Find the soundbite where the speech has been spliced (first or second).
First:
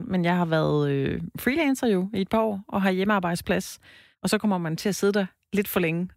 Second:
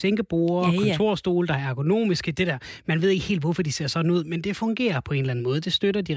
first